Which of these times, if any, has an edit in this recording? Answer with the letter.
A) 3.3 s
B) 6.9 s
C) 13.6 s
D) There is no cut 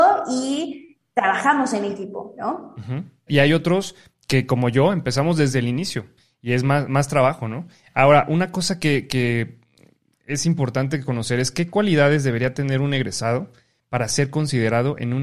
A